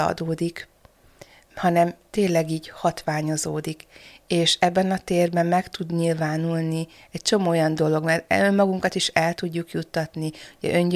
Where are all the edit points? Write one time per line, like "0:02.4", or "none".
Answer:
none